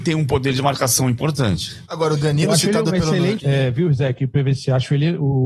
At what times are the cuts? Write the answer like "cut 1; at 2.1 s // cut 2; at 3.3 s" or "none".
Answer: cut 1; at 3.4 s